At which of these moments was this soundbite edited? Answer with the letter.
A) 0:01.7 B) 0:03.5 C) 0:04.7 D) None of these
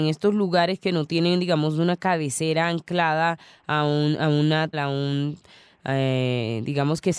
C